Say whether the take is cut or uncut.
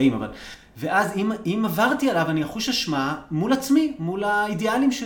uncut